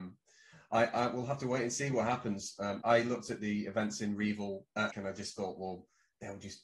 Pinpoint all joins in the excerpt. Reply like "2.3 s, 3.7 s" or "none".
2.8 s, 4.9 s

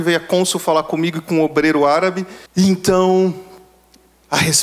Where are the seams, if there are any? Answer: 2.5 s

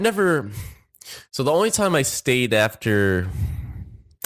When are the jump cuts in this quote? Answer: none

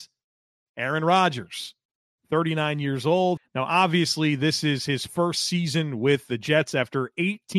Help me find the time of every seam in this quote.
3.4 s

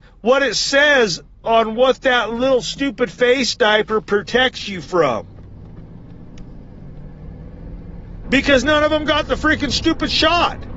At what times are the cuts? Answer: 8.2 s

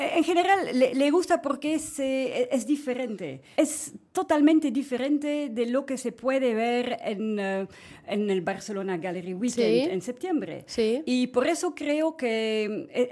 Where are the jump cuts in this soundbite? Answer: 3.5 s

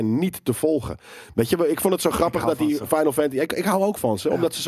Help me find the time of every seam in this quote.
none

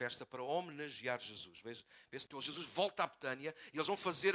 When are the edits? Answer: 2.3 s

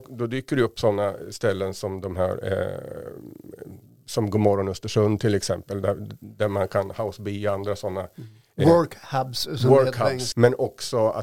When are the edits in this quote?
10.3 s

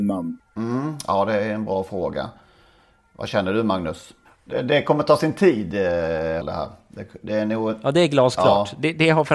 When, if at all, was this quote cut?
4.2 s, 6.4 s

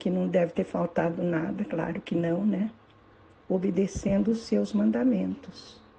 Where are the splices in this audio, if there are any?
3.4 s

